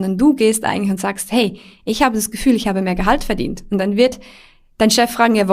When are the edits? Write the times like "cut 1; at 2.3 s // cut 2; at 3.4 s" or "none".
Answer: none

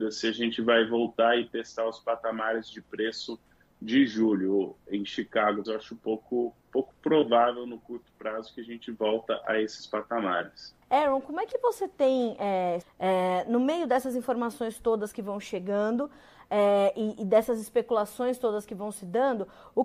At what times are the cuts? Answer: cut 1; at 5.6 s // cut 2; at 10.8 s // cut 3; at 12.8 s

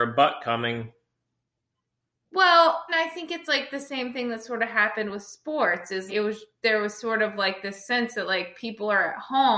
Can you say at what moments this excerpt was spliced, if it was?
cut 1; at 2.9 s // cut 2; at 6.1 s

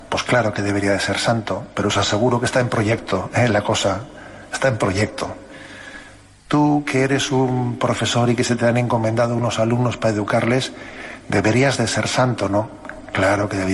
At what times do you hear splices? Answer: none

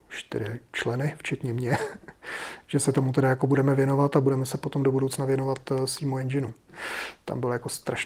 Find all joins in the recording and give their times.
cut 1; at 6.7 s

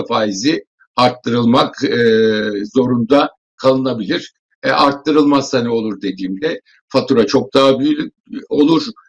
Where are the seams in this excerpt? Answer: none

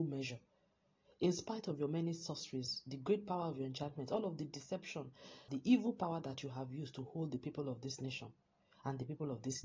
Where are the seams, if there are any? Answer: cut 1; at 5.5 s

